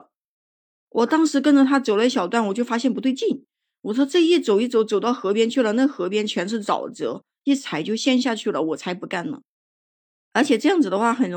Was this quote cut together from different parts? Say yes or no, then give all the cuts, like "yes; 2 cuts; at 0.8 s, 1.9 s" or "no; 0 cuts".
no; 0 cuts